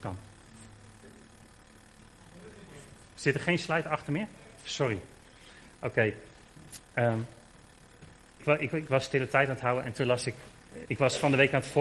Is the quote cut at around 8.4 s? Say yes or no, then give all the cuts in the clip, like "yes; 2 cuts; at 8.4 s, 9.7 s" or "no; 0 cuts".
yes; 2 cuts; at 8.4 s, 10.8 s